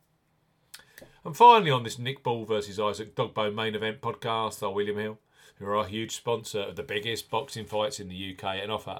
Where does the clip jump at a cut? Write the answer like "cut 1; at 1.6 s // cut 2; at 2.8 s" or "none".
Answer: none